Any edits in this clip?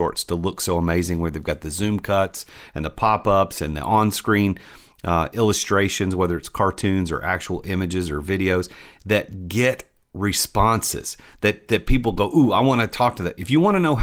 no; 0 cuts

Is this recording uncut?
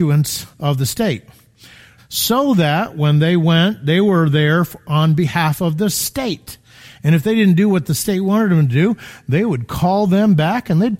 no; 1 cut; at 2.0 s

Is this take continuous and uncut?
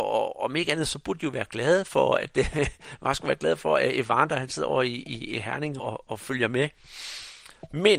no; 1 cut; at 5.8 s

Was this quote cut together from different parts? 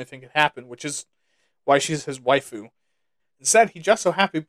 yes; 1 cut; at 3.2 s

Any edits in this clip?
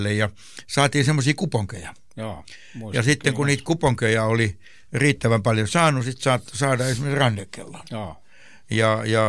no; 0 cuts

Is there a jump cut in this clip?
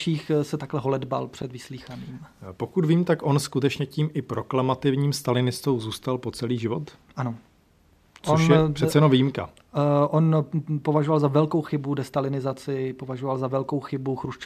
no; 0 cuts

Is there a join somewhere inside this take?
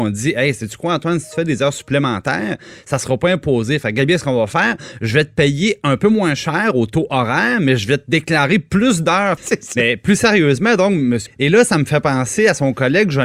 yes; 2 cuts; at 9.4 s, 11.3 s

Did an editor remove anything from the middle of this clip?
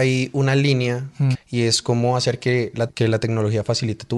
yes; 2 cuts; at 1.3 s, 2.9 s

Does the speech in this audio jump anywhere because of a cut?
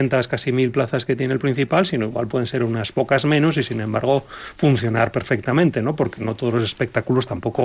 no; 0 cuts

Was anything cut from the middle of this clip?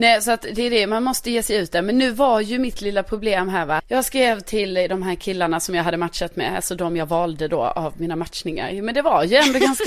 yes; 1 cut; at 3.8 s

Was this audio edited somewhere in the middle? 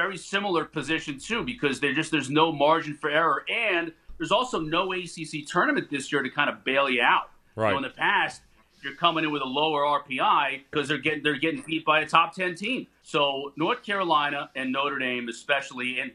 yes; 2 cuts; at 10.7 s, 13.0 s

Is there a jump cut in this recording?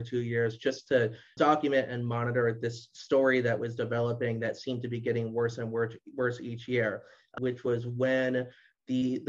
yes; 2 cuts; at 1.4 s, 7.4 s

